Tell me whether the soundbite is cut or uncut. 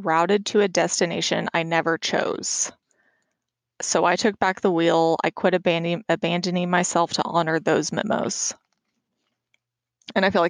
uncut